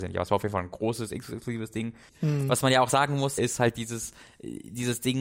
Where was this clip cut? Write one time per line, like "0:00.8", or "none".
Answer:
0:02.1
0:03.4